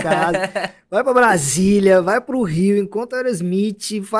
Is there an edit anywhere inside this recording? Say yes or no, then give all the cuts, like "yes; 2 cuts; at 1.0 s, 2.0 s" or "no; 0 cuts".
no; 0 cuts